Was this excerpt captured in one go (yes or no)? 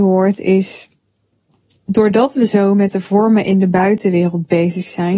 yes